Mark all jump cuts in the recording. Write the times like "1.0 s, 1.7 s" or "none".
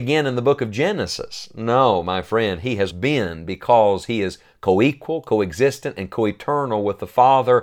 2.9 s